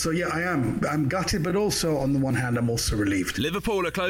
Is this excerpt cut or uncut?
uncut